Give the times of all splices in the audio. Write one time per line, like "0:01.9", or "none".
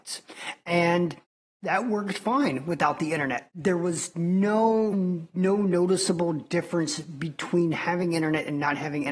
0:04.9